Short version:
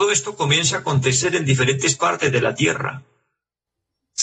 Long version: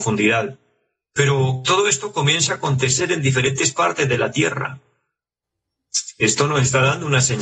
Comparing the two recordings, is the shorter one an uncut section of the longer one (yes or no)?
yes